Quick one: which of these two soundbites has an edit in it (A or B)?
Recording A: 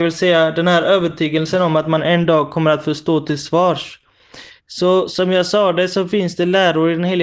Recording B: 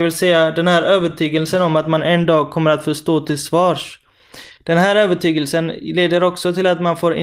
A